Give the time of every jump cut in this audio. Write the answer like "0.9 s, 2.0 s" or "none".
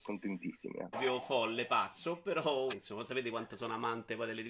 0.9 s, 2.7 s